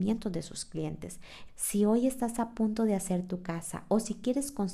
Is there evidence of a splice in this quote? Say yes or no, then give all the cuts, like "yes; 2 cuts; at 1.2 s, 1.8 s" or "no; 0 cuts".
yes; 1 cut; at 1.5 s